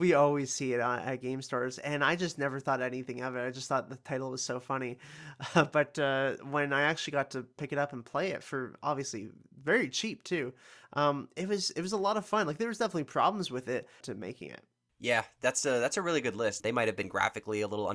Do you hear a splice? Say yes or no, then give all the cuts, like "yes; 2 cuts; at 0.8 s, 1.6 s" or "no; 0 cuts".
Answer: yes; 2 cuts; at 14.0 s, 16.6 s